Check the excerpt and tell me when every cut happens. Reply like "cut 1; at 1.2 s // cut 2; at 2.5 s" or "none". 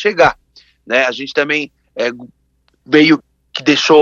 none